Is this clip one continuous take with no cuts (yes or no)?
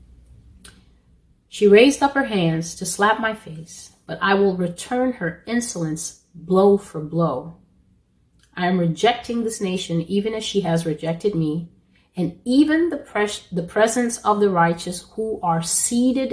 yes